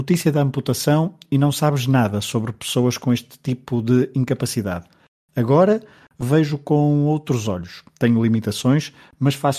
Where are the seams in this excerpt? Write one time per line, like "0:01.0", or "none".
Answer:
none